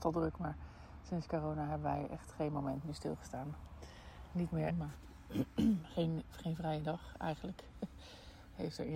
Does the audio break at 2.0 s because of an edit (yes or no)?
no